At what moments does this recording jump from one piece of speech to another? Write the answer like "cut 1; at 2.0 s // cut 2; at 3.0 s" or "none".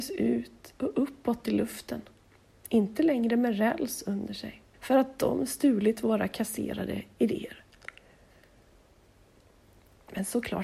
cut 1; at 4.7 s